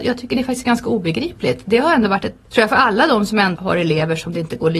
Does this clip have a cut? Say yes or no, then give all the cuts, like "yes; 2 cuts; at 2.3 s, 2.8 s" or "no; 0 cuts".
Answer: yes; 2 cuts; at 2.5 s, 3.5 s